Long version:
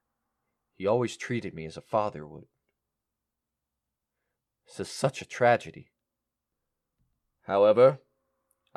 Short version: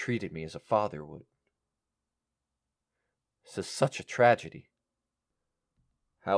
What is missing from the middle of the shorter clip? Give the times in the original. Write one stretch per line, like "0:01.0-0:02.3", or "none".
none